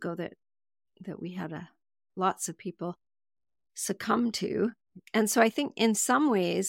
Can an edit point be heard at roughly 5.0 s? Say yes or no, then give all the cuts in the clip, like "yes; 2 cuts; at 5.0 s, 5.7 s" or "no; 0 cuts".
yes; 1 cut; at 5.0 s